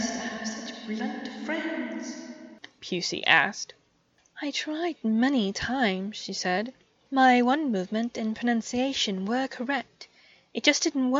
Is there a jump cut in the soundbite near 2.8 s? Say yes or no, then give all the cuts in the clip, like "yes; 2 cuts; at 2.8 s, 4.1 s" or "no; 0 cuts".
yes; 1 cut; at 2.8 s